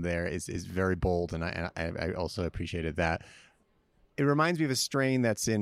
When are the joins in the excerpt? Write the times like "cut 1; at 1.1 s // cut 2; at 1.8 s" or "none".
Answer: none